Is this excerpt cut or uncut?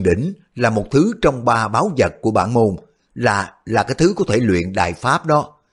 uncut